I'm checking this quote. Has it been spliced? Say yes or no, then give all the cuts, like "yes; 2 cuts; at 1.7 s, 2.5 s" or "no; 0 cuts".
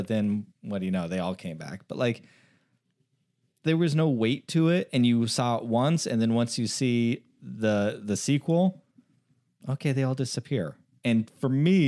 no; 0 cuts